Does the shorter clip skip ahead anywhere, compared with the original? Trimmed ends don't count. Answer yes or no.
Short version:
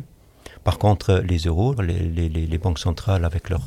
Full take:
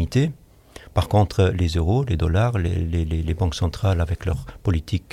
yes